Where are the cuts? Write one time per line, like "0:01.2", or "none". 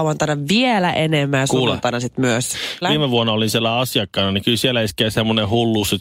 0:02.8